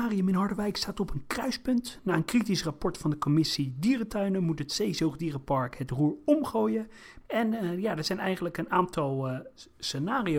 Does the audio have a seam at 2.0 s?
no; 1 cut; at 7.2 s

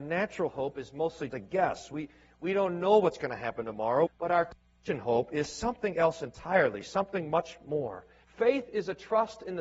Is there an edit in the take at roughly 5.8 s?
no; 3 cuts; at 1.3 s, 4.1 s, 8.2 s

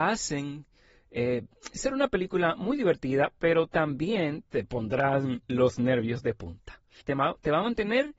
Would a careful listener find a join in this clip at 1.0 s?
no; 1 cut; at 7.0 s

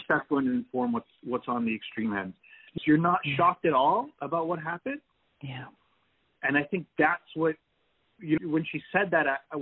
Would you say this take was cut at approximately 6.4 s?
no; 2 cuts; at 2.8 s, 8.4 s

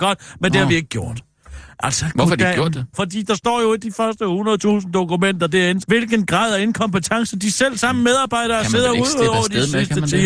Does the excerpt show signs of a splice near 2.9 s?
yes; 2 cuts; at 2.9 s, 5.8 s

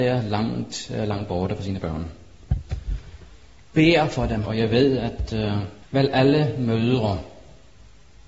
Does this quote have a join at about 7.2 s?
no; 2 cuts; at 4.4 s, 5.8 s

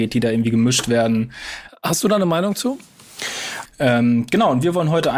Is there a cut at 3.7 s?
yes; 2 cuts; at 1.7 s, 3.7 s

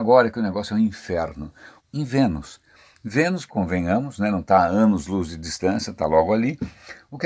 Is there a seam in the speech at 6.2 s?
no; 2 cuts; at 1.8 s, 3.5 s

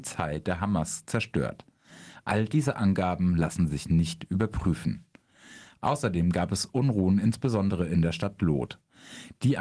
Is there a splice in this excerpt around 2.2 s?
no; 0 cuts

